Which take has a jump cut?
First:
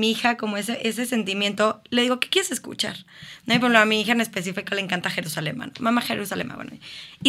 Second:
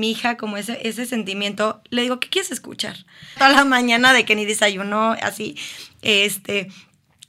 second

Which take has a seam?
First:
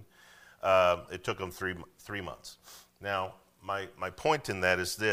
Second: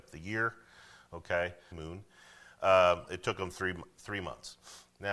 second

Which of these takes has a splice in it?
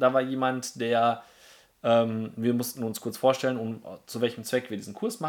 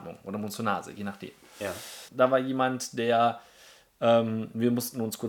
second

